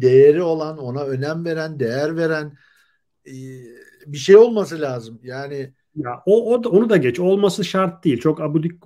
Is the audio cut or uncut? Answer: uncut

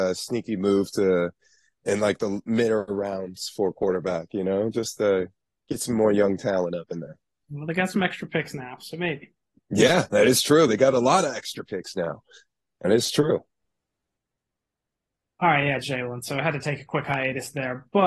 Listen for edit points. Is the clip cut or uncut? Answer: uncut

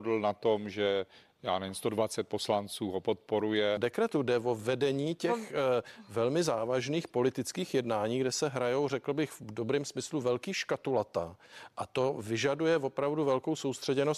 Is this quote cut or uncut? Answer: cut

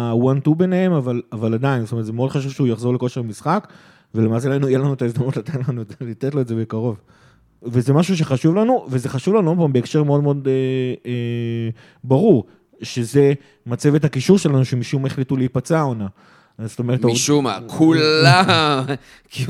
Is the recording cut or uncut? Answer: cut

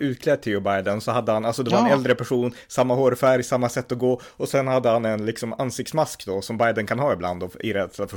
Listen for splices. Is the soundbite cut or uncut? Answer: uncut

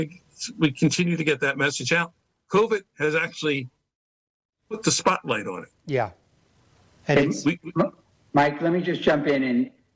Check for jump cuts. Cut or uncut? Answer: uncut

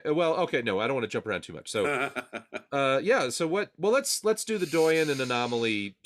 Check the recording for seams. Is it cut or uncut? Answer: uncut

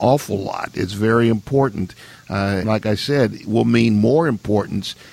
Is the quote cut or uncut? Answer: cut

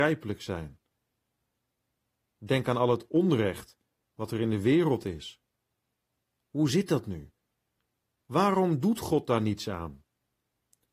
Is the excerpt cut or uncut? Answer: uncut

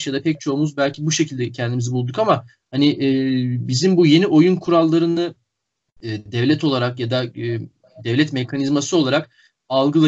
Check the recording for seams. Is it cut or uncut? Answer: uncut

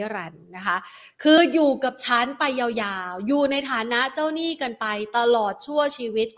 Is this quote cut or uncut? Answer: uncut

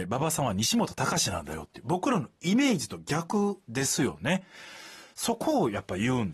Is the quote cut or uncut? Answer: uncut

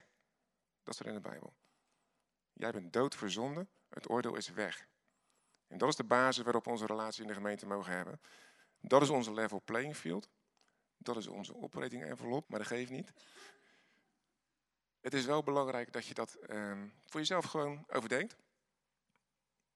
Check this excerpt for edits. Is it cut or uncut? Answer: cut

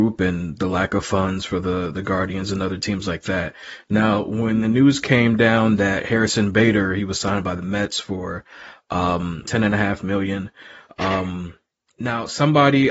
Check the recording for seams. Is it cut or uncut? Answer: cut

